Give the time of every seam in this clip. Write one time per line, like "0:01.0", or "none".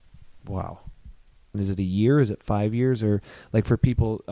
0:01.5

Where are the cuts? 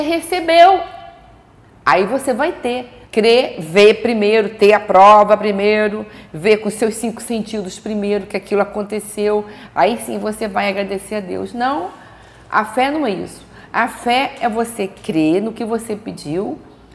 0:03.0

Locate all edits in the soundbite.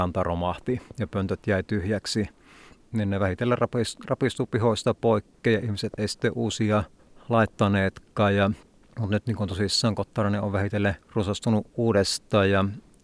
0:11.0

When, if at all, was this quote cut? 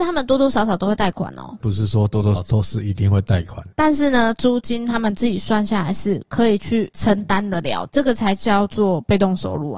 0:02.4

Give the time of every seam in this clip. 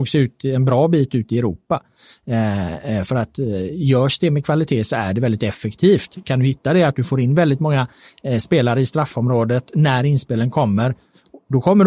none

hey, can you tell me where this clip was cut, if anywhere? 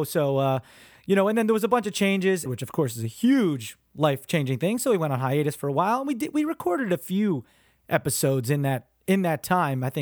0:02.5

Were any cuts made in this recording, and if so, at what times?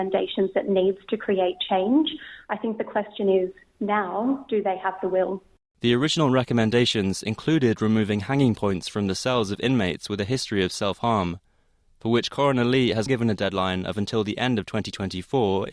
0:13.1

